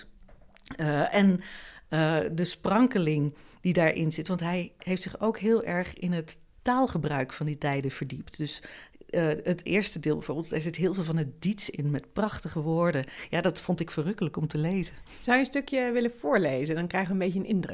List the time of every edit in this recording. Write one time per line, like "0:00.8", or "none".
none